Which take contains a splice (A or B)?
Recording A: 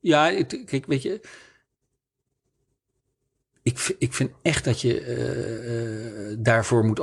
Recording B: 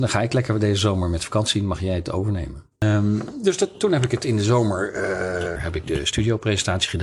B